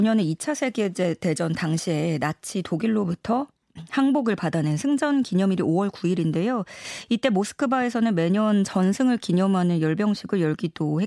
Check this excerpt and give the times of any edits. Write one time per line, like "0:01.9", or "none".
none